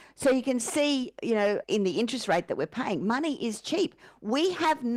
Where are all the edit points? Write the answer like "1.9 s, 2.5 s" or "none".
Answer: 1.6 s